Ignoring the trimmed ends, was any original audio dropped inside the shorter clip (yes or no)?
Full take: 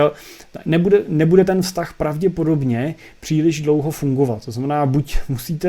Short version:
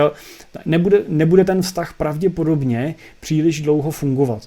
no